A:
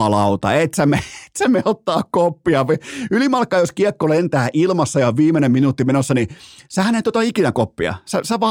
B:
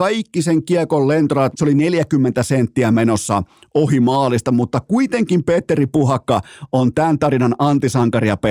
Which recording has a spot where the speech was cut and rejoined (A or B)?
B